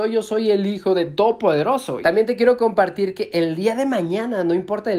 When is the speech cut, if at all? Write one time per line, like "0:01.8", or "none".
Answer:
0:02.0